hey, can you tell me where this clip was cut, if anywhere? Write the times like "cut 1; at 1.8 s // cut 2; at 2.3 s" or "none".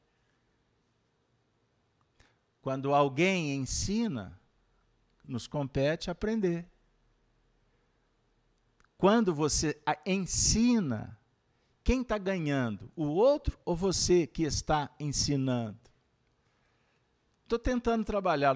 none